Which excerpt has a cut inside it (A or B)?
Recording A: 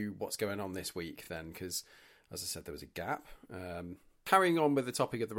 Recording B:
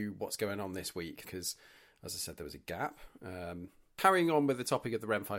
B